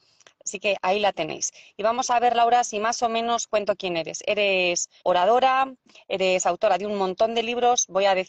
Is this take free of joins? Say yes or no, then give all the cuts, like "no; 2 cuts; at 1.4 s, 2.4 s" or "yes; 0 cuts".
no; 1 cut; at 5.0 s